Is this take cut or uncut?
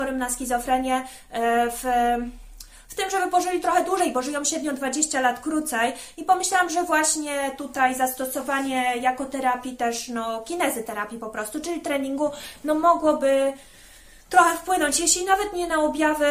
uncut